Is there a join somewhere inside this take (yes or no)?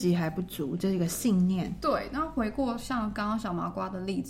no